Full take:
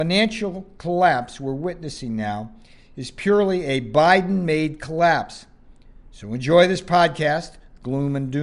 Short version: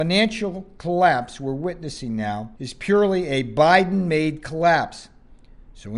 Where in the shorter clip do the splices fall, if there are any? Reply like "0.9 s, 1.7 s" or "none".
2.6 s